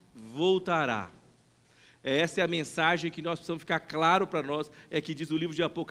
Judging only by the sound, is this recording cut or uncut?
uncut